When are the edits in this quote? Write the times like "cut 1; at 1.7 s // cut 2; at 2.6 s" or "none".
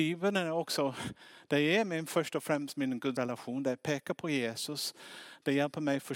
none